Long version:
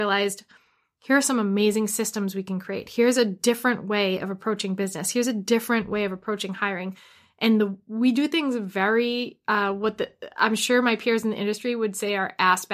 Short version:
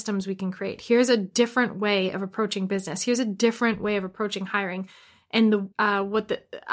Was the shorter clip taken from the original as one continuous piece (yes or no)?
no